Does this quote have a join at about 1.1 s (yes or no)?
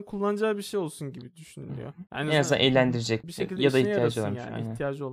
no